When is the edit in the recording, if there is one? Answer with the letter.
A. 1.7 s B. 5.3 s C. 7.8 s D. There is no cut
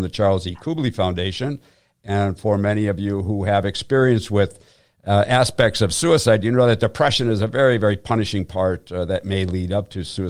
D